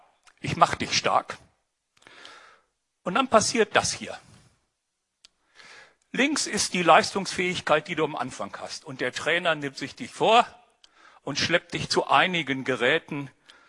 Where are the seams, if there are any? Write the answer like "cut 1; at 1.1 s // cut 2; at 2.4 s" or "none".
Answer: none